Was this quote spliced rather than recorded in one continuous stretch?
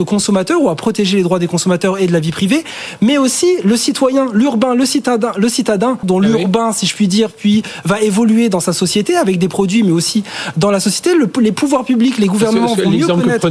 yes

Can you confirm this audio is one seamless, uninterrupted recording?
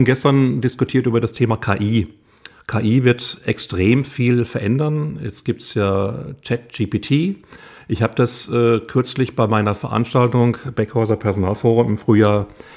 yes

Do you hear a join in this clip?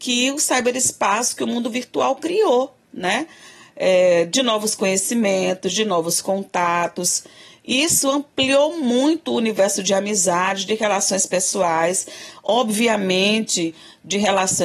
no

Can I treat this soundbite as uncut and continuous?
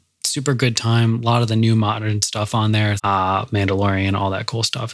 no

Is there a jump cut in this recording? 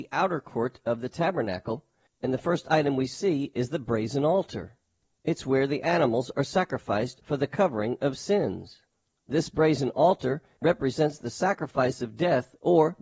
no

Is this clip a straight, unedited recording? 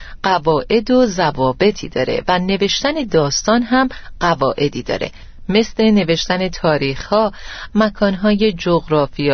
no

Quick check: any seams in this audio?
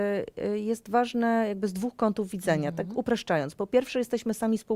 no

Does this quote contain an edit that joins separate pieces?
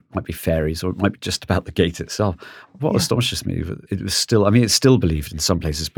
yes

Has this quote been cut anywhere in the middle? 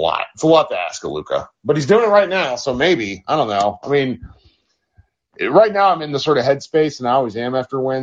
no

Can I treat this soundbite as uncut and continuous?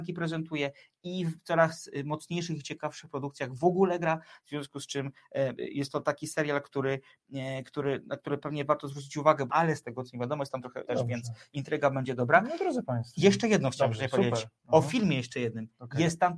no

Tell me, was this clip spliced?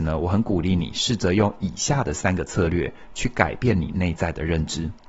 no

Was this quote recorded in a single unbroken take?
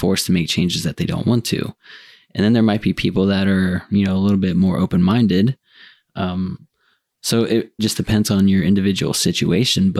no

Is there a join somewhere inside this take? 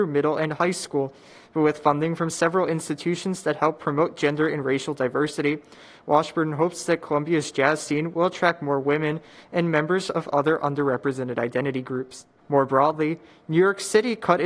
yes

